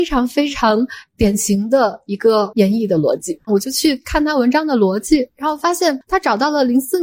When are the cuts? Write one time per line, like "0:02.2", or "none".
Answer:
0:03.5